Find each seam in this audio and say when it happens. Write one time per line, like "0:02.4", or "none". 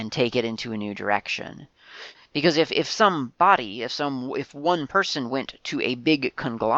0:02.1